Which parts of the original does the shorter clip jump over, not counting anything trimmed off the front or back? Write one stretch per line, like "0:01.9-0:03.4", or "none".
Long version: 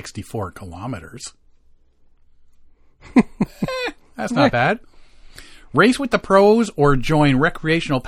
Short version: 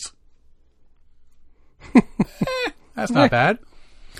none